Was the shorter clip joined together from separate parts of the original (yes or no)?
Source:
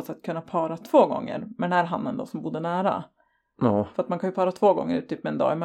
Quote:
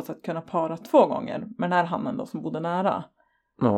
no